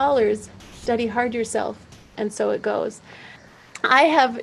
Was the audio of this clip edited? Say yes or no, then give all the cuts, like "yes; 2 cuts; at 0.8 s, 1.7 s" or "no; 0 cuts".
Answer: yes; 1 cut; at 2.2 s